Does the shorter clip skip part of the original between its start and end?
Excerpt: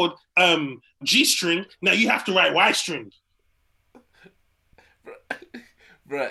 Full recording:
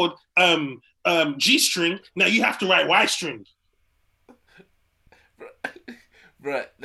yes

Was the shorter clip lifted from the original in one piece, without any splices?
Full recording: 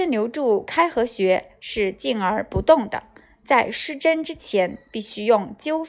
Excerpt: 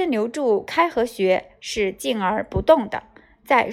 yes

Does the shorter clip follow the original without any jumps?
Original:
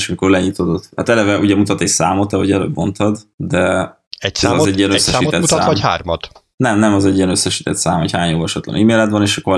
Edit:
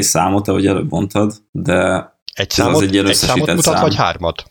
yes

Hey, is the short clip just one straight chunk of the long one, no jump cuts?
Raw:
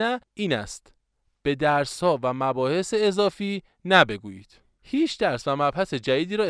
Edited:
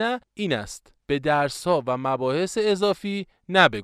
no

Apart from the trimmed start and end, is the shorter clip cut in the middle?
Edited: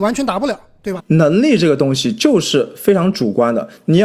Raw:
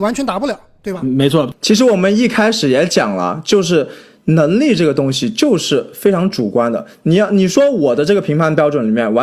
yes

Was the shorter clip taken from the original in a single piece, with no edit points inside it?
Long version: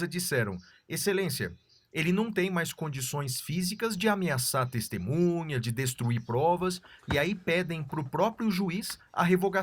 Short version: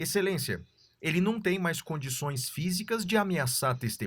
yes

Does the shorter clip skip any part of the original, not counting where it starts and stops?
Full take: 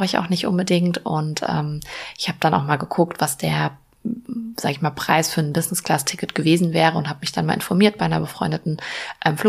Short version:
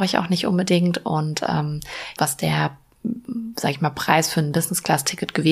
yes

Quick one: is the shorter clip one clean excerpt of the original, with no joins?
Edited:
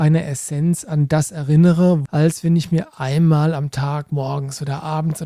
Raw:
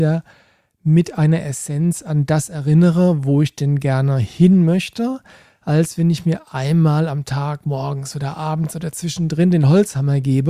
no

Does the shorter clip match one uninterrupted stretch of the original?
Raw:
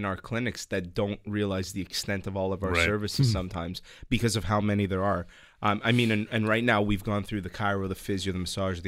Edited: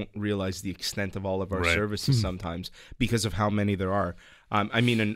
yes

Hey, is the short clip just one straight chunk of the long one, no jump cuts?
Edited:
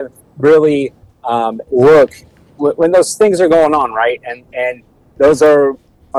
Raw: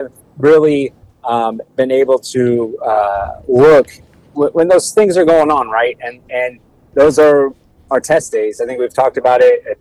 no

